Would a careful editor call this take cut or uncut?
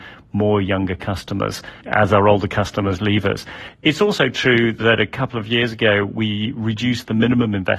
cut